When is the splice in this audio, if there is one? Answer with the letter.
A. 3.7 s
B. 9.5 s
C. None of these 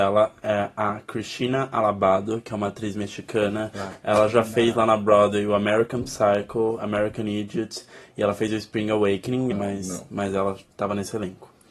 B